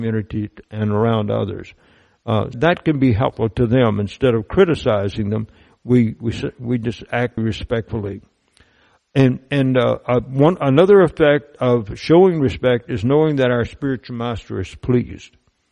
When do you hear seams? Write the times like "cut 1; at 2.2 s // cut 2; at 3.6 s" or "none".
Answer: cut 1; at 2.5 s // cut 2; at 7.4 s